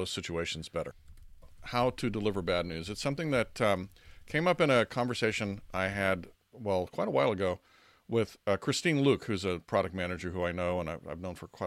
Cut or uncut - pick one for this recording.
uncut